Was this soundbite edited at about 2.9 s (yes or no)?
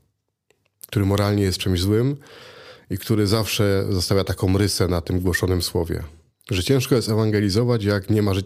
no